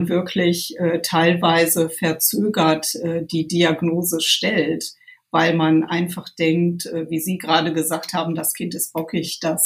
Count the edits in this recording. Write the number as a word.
zero